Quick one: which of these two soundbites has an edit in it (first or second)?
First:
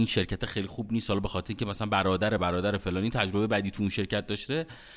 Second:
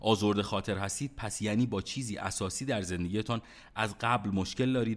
first